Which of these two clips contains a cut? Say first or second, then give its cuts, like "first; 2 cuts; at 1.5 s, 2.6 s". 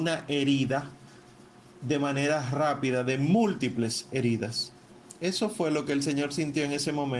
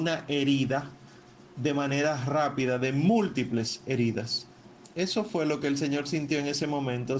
second; 1 cut; at 1.5 s